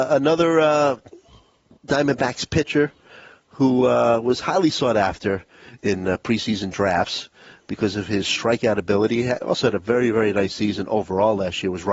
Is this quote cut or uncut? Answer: uncut